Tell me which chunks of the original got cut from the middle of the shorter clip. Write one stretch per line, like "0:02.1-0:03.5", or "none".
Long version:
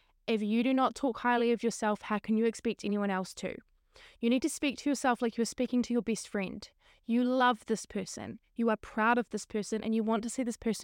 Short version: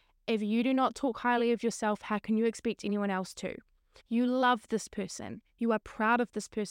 0:04.0-0:07.0